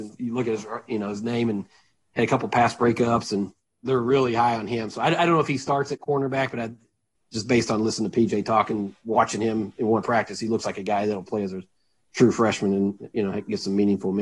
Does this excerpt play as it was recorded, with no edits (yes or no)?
yes